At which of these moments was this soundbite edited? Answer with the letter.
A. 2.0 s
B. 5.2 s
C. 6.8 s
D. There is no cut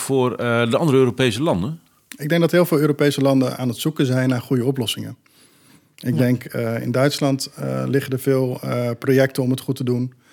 D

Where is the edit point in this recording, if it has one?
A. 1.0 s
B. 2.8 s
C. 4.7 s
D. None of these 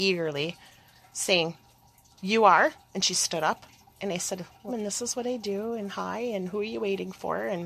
C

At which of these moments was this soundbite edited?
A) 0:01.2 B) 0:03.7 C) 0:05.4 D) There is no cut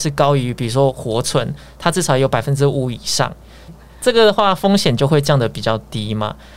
B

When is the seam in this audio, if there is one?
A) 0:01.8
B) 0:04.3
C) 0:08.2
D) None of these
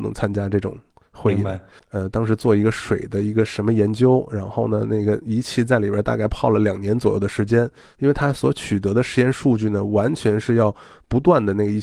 A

